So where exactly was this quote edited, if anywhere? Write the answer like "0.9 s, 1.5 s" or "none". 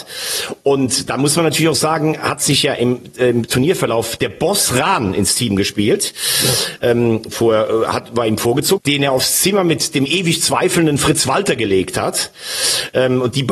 7.3 s, 8.8 s